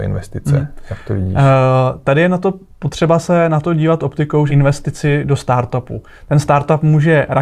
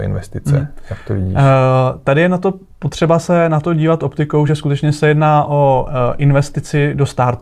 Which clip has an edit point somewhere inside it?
first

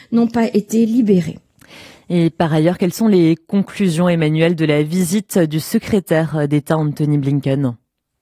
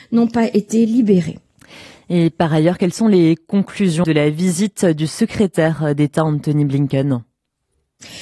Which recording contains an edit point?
second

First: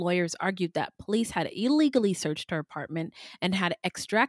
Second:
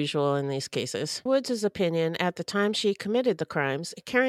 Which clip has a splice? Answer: second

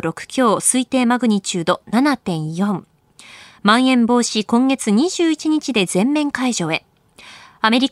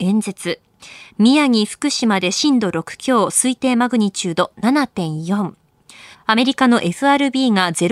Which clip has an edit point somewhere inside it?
second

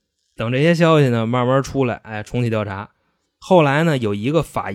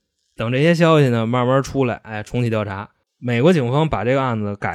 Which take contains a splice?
second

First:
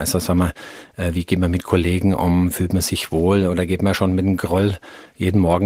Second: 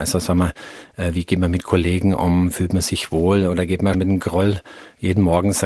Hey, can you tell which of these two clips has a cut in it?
second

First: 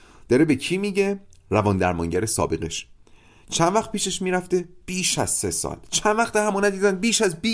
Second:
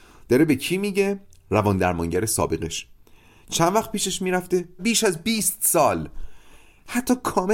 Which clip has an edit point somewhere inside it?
second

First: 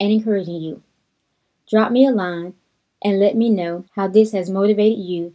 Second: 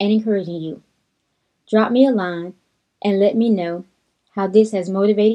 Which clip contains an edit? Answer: first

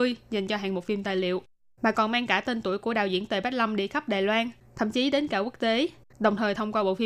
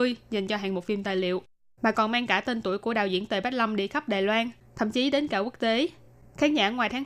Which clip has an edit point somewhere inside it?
first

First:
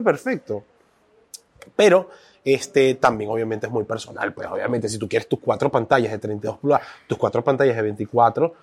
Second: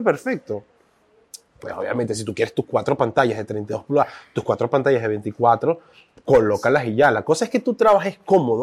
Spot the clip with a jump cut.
second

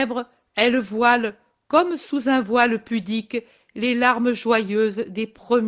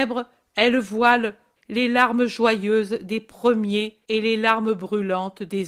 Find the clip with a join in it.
second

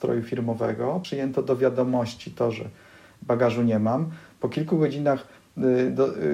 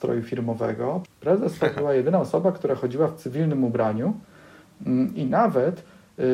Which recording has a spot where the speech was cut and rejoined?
second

